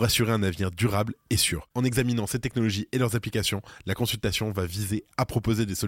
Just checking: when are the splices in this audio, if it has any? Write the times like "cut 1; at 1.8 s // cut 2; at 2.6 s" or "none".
cut 1; at 1.7 s